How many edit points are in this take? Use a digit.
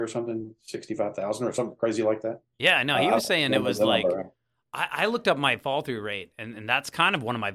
0